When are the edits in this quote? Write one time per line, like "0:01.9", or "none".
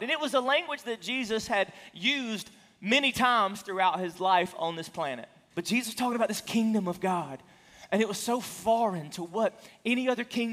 0:05.5